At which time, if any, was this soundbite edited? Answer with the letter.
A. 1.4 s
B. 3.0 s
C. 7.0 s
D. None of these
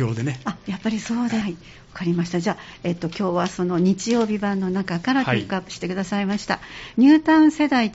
A